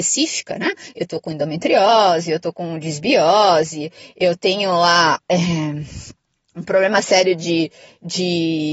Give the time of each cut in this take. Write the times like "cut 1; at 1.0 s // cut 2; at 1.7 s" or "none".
none